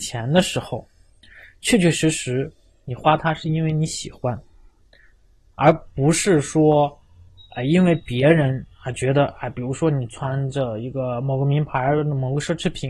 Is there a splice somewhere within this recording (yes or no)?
no